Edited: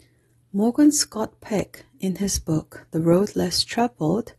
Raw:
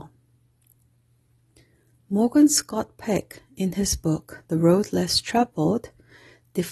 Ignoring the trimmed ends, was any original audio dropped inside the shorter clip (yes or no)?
no